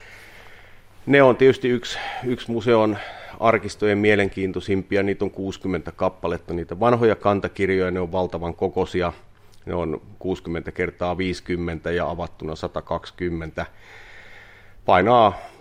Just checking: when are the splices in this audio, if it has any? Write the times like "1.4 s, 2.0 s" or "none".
none